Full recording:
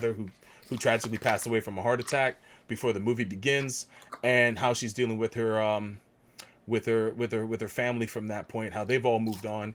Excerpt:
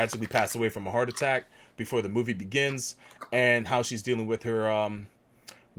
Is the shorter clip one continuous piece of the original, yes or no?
yes